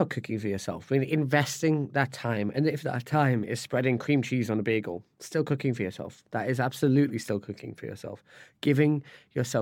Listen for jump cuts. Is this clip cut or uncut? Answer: uncut